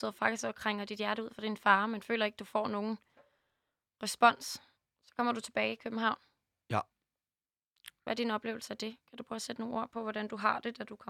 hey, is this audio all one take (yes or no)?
yes